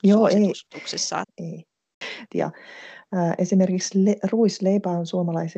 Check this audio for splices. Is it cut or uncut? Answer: cut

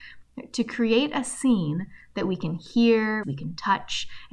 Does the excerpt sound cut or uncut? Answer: cut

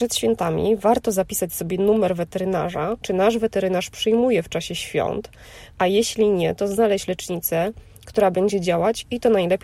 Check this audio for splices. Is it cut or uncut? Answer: cut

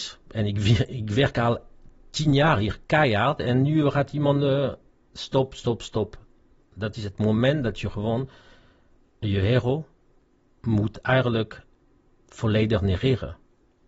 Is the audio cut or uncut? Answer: uncut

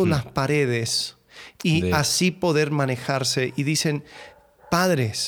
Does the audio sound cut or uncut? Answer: uncut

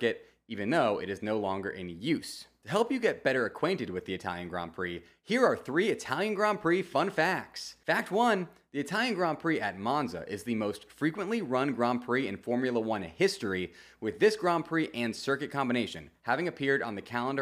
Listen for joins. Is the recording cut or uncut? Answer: uncut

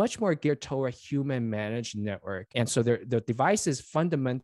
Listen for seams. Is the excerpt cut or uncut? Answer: cut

